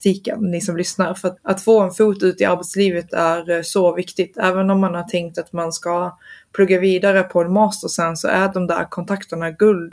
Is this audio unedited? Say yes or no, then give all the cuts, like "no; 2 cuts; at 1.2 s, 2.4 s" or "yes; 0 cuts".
no; 1 cut; at 1.4 s